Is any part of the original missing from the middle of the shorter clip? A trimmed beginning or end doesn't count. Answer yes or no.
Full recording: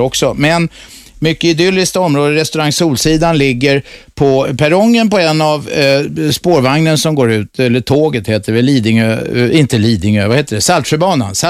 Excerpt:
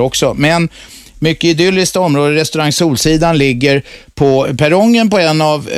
no